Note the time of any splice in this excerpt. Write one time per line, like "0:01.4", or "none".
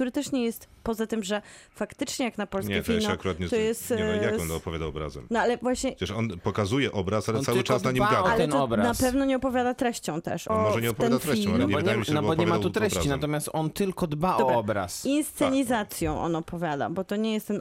0:10.5